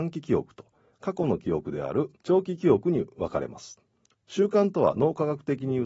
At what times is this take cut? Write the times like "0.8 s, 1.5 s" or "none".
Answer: 2.2 s